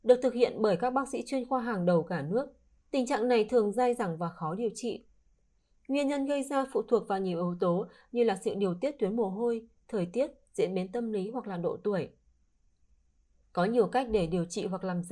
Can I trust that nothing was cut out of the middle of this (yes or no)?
no